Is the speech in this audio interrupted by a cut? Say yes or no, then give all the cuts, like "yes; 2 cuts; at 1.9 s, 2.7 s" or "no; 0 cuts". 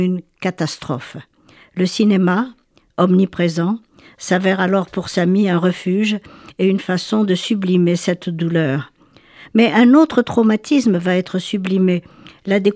no; 0 cuts